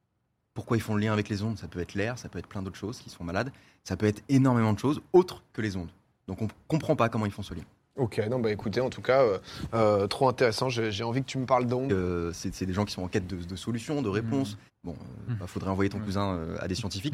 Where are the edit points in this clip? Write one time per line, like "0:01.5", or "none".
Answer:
0:03.0
0:11.9
0:14.7